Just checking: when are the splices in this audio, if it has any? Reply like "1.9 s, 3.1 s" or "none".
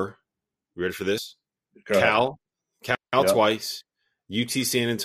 none